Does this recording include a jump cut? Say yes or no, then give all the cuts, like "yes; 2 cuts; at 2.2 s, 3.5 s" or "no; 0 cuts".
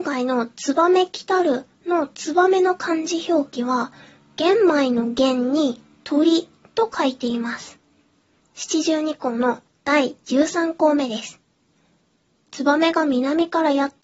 yes; 1 cut; at 8.4 s